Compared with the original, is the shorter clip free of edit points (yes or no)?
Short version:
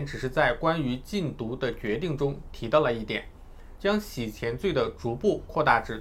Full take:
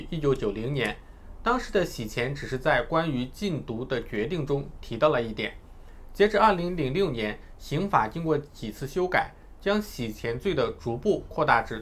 no